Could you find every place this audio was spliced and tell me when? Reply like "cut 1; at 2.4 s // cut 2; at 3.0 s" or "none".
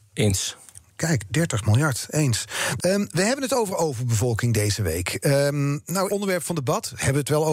cut 1; at 2.8 s // cut 2; at 6.1 s